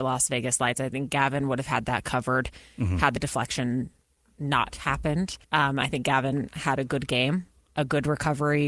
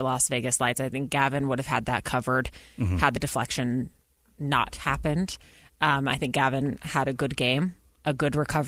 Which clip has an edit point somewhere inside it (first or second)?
first